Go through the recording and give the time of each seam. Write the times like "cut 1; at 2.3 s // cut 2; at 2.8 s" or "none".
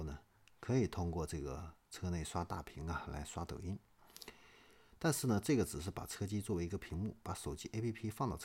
none

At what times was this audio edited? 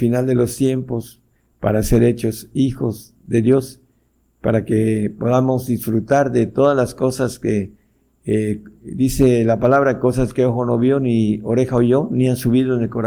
none

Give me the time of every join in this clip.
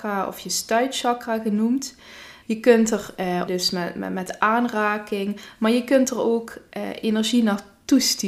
cut 1; at 2.4 s // cut 2; at 3.5 s

